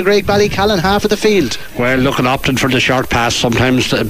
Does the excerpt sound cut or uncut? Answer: uncut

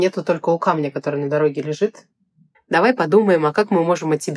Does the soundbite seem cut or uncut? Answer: cut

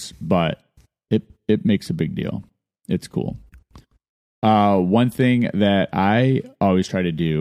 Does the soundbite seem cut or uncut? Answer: uncut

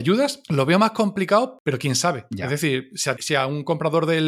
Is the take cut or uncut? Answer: cut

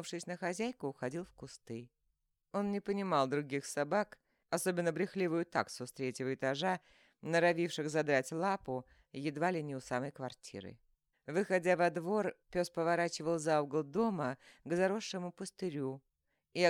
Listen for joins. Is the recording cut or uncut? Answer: cut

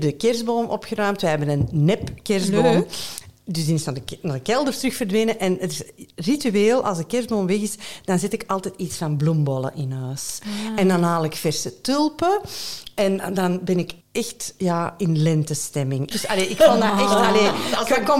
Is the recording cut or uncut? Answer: cut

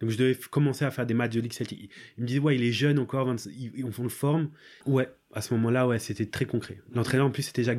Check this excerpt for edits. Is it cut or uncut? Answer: cut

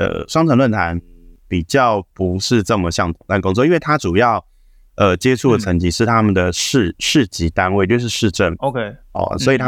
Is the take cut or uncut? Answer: uncut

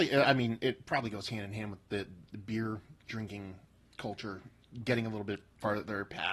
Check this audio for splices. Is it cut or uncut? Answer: uncut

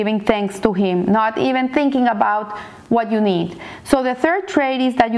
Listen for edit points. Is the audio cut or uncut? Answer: uncut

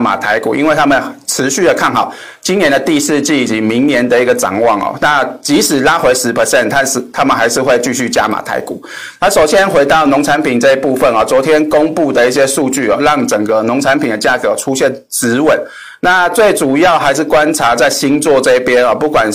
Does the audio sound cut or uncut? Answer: uncut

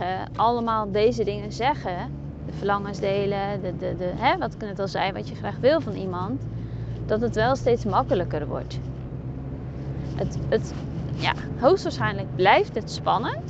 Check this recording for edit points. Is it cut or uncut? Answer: uncut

